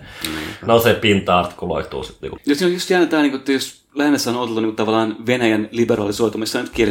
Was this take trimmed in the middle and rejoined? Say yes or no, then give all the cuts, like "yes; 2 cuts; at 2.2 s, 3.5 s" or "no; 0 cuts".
yes; 1 cut; at 2.4 s